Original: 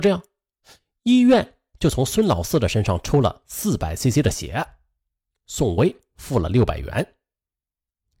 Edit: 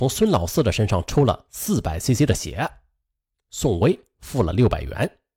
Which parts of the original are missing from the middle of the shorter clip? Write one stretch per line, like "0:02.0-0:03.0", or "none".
none

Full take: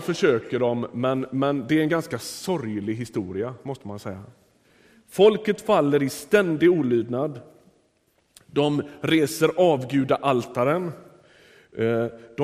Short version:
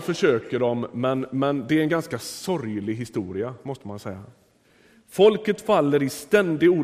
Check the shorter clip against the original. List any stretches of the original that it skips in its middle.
none

